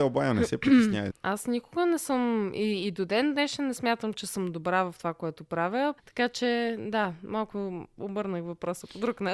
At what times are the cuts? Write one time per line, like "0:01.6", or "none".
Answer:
0:01.1
0:06.0